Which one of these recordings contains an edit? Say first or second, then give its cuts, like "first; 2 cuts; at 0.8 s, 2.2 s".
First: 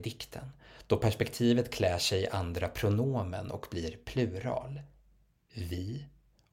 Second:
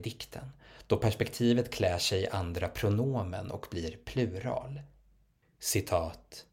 second; 1 cut; at 5.4 s